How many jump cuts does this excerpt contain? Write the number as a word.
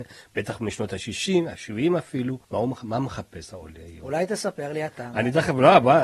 one